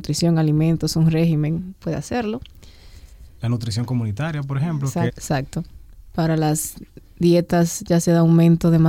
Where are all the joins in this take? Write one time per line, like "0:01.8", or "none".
0:05.1